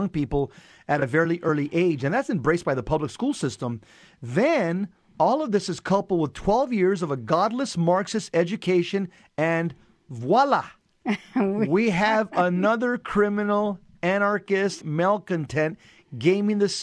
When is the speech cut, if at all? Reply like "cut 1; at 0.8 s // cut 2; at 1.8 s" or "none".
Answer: cut 1; at 10.8 s // cut 2; at 14.8 s